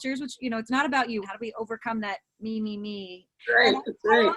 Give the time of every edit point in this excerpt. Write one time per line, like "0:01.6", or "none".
0:01.2
0:03.4